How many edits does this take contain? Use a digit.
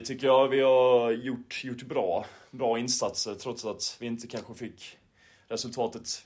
0